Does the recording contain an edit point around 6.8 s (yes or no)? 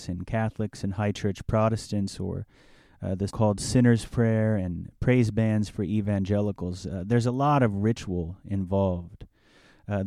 no